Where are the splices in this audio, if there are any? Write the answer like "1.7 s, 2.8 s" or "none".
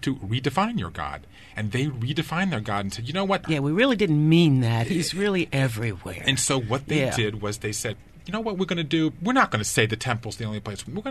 3.4 s